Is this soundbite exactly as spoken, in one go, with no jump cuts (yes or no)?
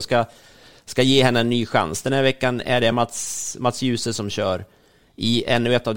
yes